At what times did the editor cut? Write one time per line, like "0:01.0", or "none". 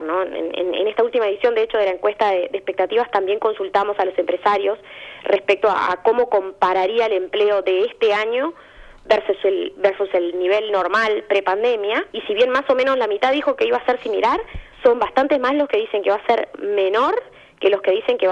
0:12.1
0:14.7